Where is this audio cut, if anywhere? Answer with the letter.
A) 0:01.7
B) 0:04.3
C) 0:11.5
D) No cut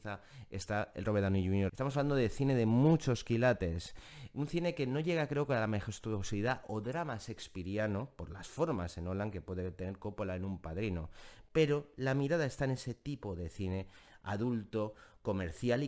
A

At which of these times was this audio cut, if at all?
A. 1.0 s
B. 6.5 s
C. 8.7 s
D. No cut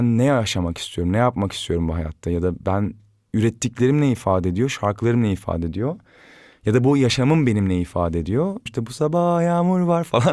C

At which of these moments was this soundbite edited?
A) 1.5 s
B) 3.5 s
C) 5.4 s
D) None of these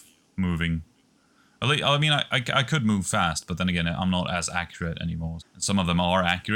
C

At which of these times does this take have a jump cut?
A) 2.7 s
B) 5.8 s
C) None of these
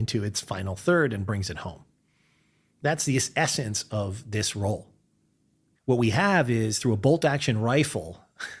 B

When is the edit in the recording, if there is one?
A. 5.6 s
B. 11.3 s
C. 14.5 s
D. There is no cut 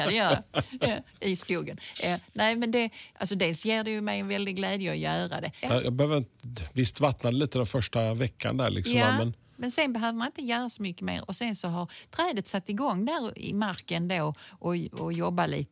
A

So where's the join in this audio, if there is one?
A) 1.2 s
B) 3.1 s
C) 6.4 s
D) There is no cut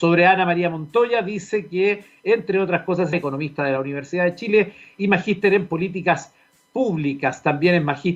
B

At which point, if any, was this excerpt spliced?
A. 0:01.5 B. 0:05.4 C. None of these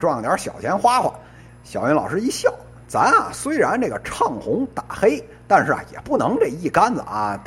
A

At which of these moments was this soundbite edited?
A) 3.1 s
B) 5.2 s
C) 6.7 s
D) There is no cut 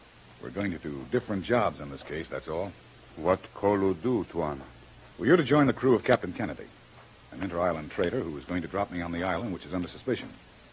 D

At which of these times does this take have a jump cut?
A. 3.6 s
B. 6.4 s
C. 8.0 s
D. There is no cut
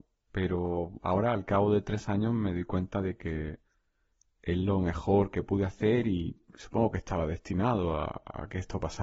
B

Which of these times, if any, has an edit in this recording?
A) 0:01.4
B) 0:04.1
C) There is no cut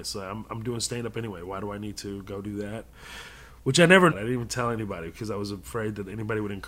B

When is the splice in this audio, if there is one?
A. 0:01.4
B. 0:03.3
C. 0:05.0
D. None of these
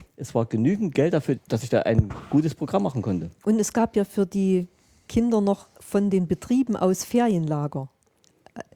A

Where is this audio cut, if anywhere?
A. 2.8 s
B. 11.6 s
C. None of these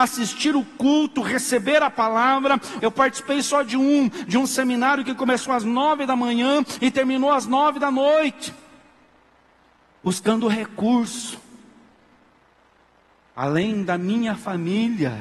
A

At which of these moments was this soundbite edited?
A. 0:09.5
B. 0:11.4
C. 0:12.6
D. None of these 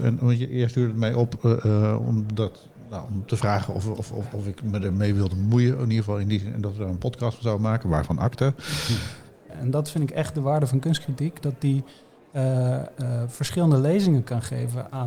A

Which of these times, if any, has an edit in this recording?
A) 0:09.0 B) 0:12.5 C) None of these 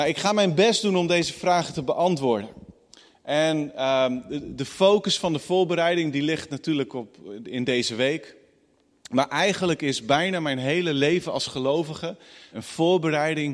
B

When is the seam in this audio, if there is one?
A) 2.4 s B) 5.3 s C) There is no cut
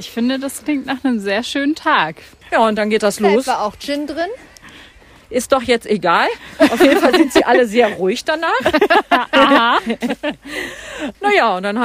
A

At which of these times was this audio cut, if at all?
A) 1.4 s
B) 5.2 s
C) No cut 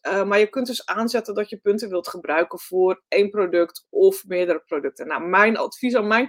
C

